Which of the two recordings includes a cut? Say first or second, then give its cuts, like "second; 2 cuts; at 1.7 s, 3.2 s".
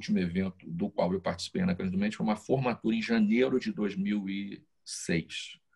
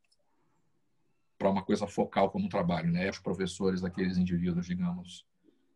second; 1 cut; at 3.1 s